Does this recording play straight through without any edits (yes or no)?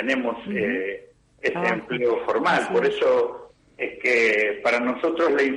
yes